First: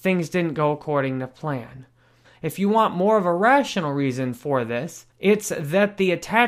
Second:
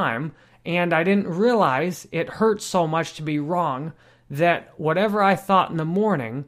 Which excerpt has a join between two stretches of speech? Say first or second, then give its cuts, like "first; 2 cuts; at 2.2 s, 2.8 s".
first; 2 cuts; at 2.2 s, 5.1 s